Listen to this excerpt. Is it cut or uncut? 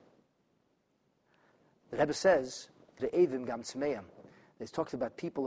cut